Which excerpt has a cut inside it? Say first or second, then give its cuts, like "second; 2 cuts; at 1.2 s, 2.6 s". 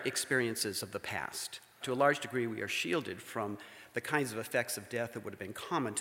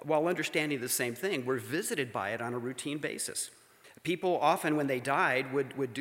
first; 1 cut; at 1.8 s